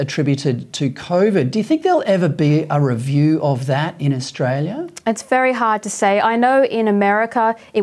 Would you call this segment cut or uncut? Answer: uncut